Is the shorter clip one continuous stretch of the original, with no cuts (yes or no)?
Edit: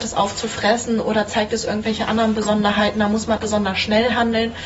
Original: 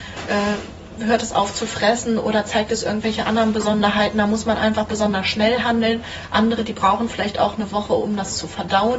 no